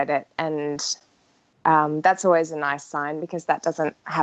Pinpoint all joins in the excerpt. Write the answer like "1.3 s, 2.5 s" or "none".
none